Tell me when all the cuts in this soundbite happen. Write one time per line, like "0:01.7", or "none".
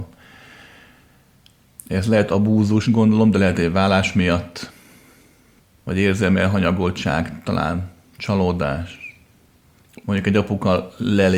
0:02.8